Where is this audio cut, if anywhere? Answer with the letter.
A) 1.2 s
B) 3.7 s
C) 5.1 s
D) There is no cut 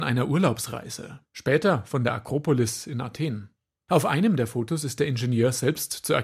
A